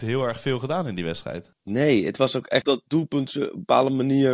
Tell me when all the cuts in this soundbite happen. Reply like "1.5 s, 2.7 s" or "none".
1.5 s, 2.6 s